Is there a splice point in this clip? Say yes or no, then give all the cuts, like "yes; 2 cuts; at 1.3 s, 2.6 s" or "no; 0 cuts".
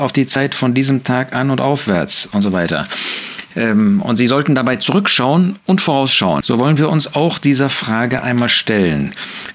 yes; 1 cut; at 6.4 s